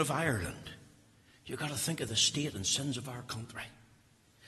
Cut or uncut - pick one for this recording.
uncut